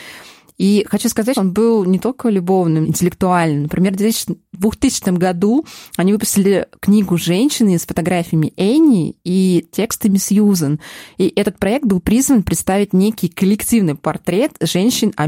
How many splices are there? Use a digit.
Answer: 2